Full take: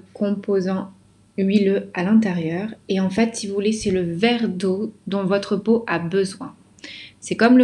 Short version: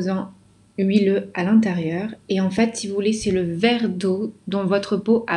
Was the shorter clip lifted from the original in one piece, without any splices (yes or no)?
yes